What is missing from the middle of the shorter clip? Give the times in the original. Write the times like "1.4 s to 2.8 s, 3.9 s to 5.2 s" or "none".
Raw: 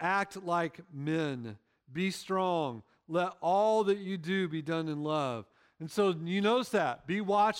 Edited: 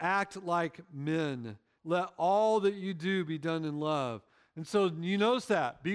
1.8 s to 3.0 s